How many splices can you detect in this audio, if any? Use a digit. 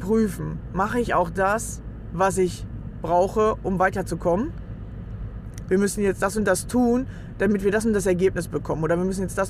1